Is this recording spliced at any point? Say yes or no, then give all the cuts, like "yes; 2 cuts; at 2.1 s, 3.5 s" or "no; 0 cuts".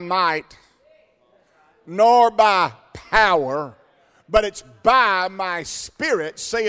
no; 0 cuts